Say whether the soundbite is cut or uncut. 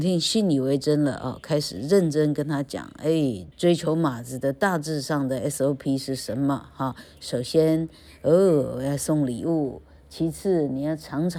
cut